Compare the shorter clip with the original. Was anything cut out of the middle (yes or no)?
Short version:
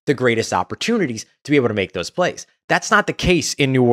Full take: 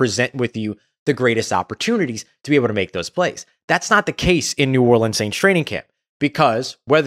no